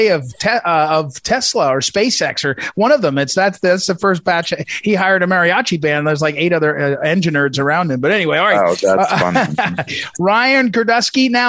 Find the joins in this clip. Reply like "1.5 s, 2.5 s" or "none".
none

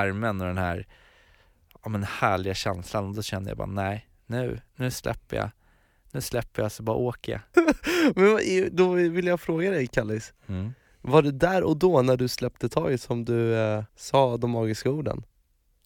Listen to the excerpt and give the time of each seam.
7.5 s, 13.9 s

